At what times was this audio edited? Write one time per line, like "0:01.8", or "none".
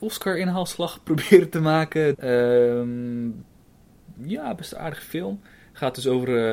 0:02.1